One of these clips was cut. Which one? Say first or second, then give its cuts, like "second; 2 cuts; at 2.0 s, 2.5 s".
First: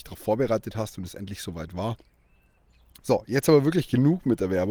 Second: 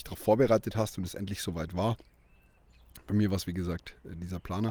first; 1 cut; at 3.0 s